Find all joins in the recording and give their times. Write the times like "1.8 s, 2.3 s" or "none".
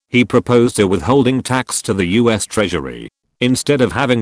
3.3 s